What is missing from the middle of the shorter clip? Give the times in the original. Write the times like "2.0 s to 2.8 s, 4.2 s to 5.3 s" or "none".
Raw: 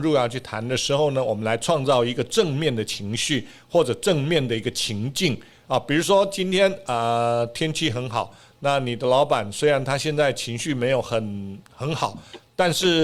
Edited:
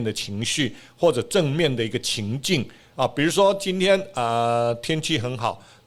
none